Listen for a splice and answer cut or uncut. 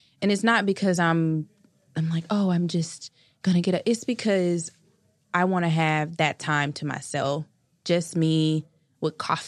uncut